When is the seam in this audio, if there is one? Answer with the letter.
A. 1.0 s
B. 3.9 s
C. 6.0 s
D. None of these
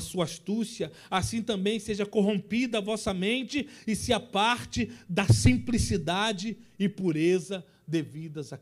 D